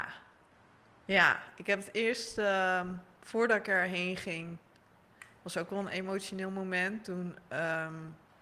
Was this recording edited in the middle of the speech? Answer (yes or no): no